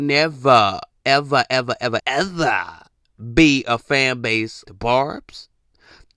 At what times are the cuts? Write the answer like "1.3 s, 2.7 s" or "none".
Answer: 2.0 s, 4.6 s

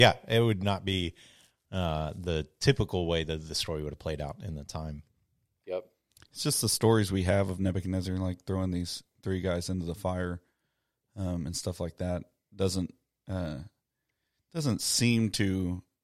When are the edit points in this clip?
none

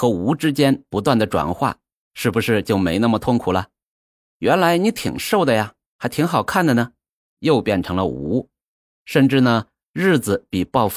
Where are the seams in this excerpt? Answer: 4.3 s, 7.3 s

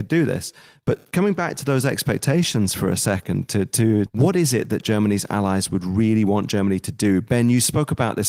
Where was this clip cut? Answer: 4.1 s

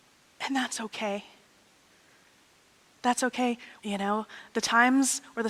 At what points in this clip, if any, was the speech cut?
3.8 s

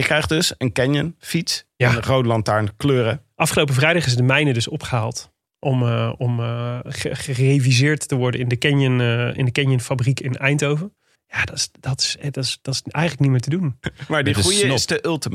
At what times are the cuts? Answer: 11.1 s, 13.8 s

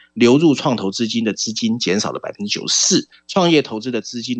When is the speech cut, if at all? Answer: 3.1 s

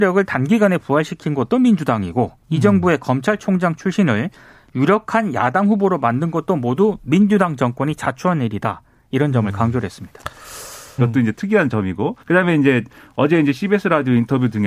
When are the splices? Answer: 11.0 s, 12.2 s

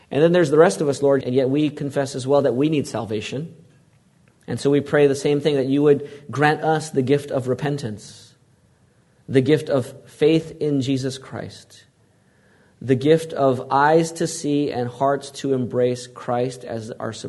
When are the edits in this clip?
1.2 s, 4.4 s

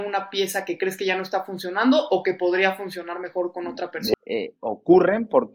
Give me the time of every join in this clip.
4.1 s

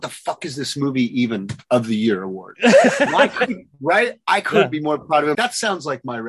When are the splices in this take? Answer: 5.3 s

